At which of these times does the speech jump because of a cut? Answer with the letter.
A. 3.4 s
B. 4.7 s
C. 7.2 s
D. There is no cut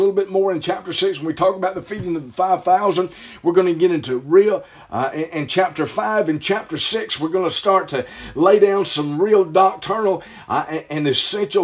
D